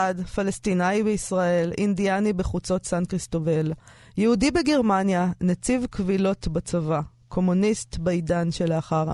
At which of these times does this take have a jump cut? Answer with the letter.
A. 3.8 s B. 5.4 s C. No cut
C